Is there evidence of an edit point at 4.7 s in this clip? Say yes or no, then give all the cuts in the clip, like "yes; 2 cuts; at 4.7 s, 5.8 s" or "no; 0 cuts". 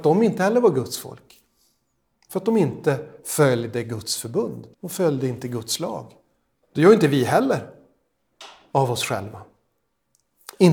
yes; 2 cuts; at 4.7 s, 6.6 s